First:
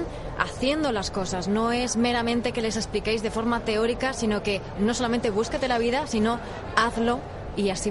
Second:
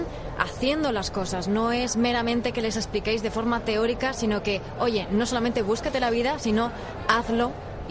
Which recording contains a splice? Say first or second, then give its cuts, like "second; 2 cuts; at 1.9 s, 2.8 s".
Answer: first; 1 cut; at 4.8 s